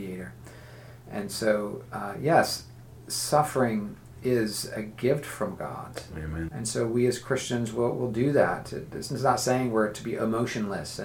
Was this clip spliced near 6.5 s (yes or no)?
yes